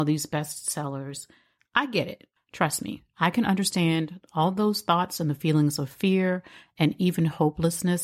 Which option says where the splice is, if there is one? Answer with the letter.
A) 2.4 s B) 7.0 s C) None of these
A